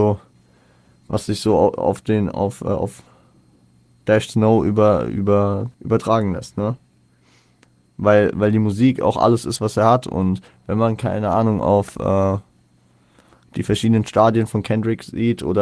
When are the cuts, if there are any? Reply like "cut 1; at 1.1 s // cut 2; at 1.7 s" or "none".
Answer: cut 1; at 5.7 s

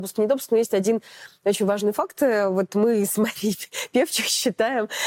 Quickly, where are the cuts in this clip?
none

